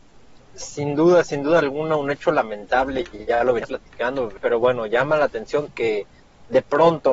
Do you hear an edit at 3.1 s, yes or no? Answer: no